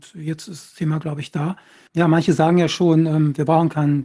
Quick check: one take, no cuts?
no; 1 cut; at 1.9 s

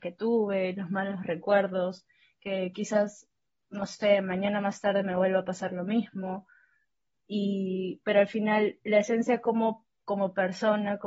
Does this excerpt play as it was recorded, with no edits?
yes; 0 cuts

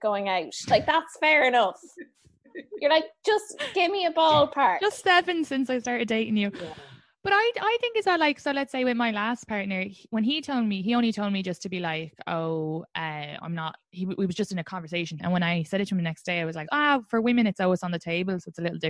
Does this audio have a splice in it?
yes; 2 cuts; at 15.2 s, 16.7 s

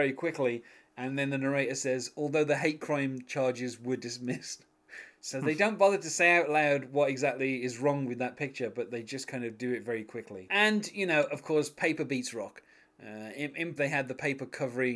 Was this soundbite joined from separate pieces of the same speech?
yes; 2 cuts; at 10.5 s, 13.8 s

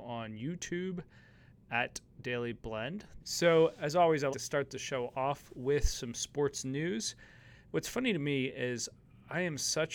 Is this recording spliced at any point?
yes; 2 cuts; at 3.2 s, 4.3 s

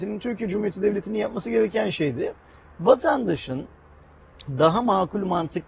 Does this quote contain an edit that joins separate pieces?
no; 0 cuts

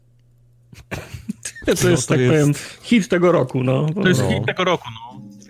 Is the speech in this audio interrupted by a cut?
no; 0 cuts

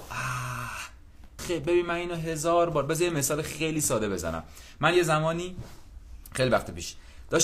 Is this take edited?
yes; 1 cut; at 1.4 s

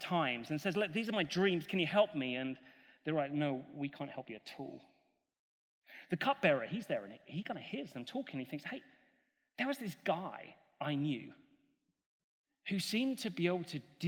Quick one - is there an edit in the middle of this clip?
no; 0 cuts

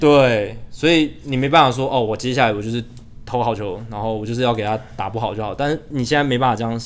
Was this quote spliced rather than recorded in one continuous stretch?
no; 0 cuts

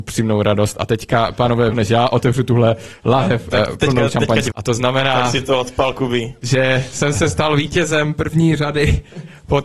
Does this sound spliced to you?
yes; 2 cuts; at 1.7 s, 4.5 s

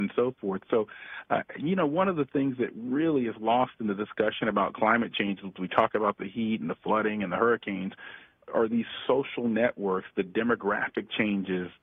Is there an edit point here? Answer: no; 0 cuts

